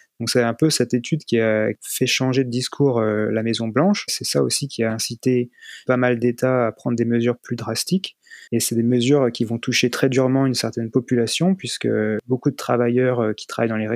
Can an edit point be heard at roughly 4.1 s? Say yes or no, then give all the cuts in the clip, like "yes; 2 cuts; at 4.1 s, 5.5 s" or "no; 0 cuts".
no; 2 cuts; at 5.9 s, 8.5 s